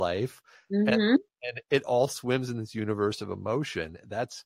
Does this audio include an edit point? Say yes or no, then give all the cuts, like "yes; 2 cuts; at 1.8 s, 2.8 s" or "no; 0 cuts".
no; 0 cuts